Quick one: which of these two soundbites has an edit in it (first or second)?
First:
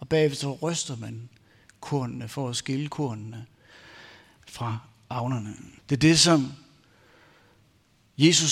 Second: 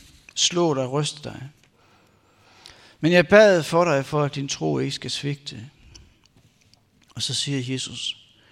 first